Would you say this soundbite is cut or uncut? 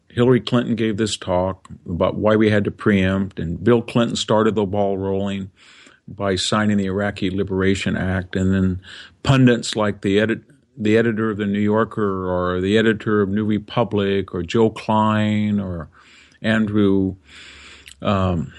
uncut